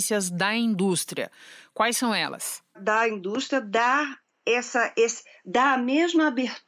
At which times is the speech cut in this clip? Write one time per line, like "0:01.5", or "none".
none